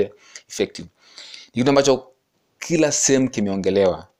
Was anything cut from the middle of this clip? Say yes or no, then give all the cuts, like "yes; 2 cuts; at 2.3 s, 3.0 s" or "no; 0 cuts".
no; 0 cuts